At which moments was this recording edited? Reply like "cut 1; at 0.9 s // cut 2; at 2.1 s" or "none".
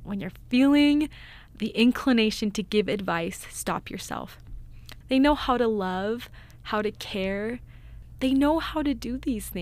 cut 1; at 5.0 s